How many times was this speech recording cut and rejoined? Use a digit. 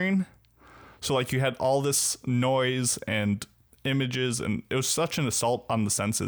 0